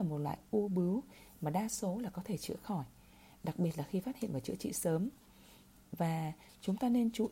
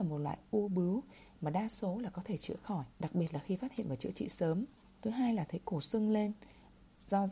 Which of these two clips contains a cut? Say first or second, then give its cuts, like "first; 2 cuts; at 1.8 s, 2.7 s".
second; 2 cuts; at 2.9 s, 4.9 s